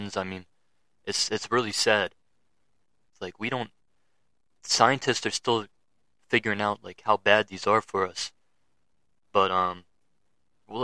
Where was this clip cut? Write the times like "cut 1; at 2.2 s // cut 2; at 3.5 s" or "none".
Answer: cut 1; at 3.1 s